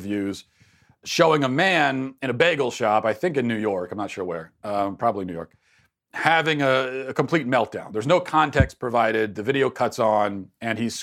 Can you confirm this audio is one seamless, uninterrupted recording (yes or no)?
yes